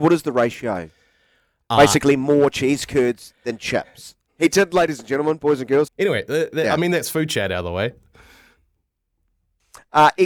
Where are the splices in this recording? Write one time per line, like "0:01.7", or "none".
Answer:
0:04.3
0:05.9